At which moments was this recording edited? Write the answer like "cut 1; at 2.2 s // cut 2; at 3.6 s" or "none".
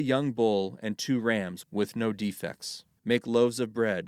cut 1; at 3.0 s